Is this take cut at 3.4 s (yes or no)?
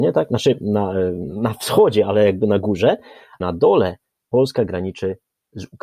yes